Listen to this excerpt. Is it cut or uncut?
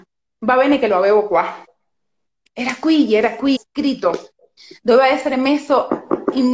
cut